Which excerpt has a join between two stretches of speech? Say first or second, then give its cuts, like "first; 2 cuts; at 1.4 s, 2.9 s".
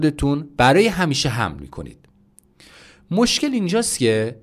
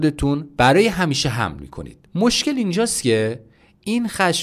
second; 1 cut; at 2.1 s